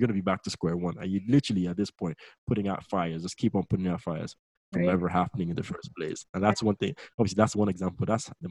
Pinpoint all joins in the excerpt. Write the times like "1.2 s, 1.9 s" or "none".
4.6 s